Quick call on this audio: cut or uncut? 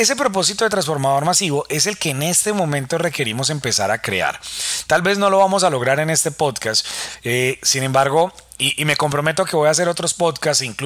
uncut